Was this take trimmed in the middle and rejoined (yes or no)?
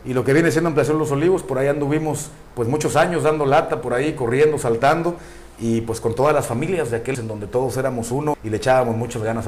yes